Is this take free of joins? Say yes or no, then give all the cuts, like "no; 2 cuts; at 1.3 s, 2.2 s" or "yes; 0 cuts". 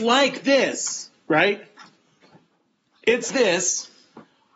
no; 1 cut; at 3.3 s